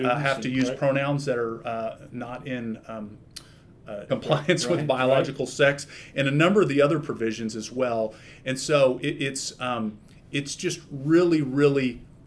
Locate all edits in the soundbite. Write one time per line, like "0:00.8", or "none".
0:04.1